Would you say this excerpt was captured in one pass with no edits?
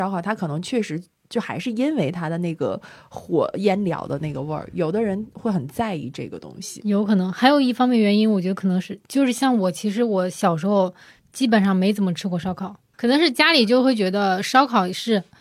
yes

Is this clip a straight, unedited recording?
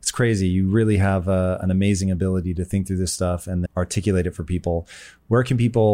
no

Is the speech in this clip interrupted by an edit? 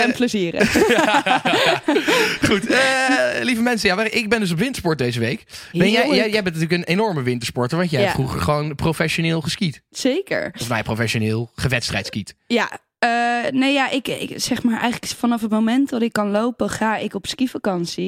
no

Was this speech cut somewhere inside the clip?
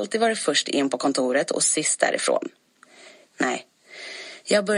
yes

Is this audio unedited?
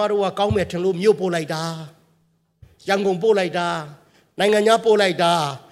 yes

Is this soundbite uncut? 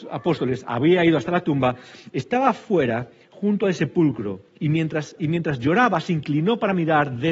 no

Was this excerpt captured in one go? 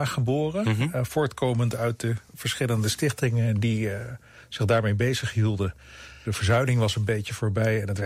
no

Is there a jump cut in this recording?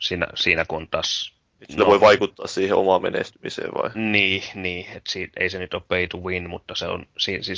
no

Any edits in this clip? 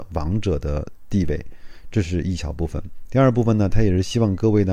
no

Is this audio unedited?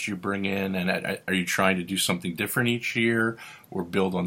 yes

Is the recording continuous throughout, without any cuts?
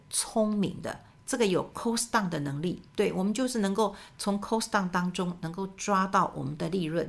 no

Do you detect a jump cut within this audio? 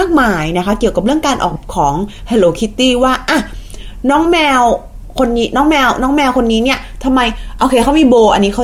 yes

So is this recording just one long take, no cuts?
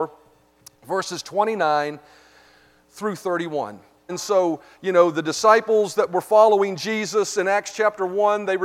no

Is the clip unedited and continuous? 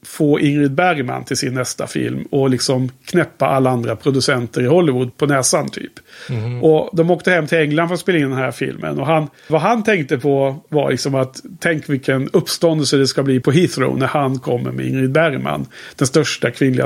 no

